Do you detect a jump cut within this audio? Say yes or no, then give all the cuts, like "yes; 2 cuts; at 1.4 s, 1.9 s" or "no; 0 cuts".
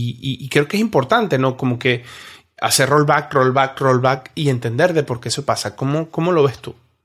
no; 0 cuts